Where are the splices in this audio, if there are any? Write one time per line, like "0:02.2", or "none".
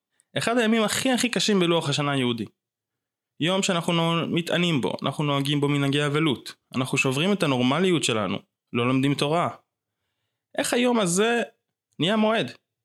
0:08.5